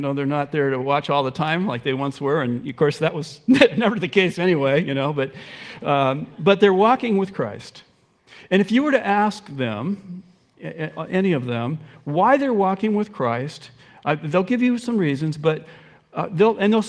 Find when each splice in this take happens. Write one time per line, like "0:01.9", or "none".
none